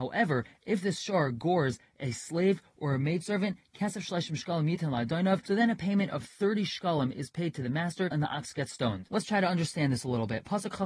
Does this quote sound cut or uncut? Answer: cut